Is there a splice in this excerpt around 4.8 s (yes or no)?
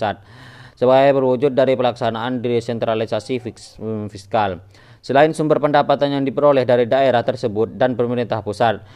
no